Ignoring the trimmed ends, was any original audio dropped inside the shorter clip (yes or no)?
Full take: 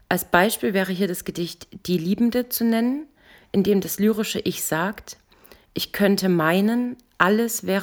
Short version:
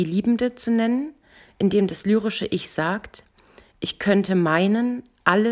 no